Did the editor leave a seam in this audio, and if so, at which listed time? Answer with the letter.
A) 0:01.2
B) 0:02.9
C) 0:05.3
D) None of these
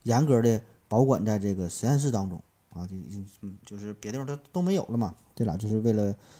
D